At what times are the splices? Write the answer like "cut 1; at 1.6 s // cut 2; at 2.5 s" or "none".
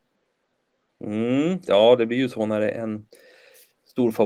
cut 1; at 1.6 s